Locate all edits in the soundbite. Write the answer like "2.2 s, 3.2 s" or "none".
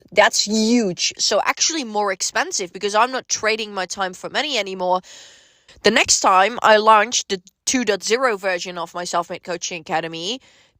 1.2 s, 5.7 s

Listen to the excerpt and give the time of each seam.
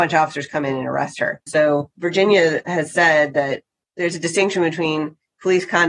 1.5 s

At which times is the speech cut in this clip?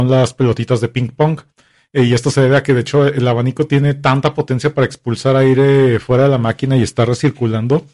none

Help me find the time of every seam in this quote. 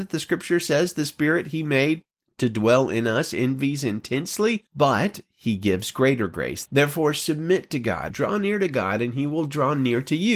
4.7 s, 6.7 s, 8.1 s

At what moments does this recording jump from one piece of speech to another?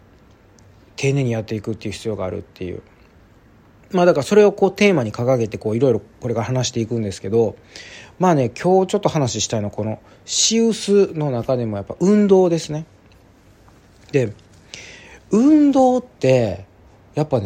none

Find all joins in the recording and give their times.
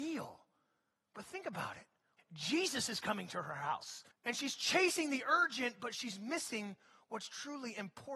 2.2 s, 4.1 s

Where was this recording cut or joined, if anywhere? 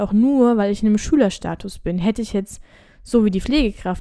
none

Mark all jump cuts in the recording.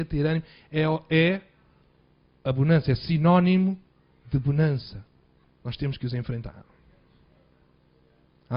5.4 s

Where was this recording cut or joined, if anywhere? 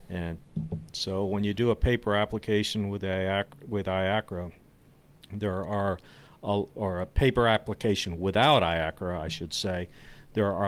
6.7 s

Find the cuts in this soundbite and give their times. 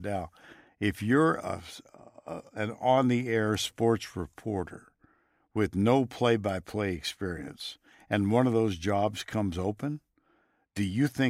none

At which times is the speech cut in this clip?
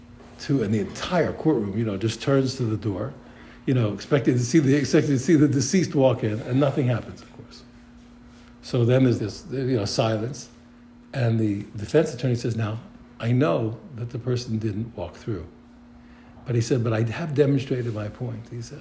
9.2 s

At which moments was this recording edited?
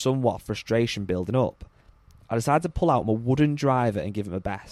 none

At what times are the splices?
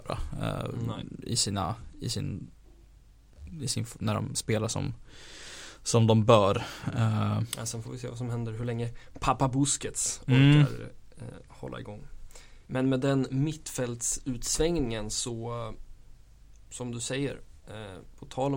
12.7 s

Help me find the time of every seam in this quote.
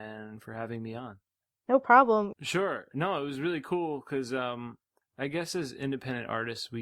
2.3 s

